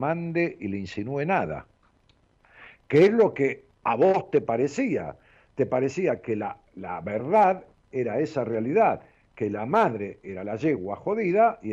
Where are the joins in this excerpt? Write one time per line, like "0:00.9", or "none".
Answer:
0:06.7